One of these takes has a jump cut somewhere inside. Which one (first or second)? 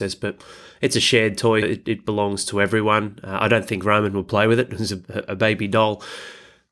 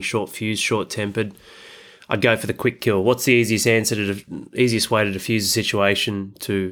first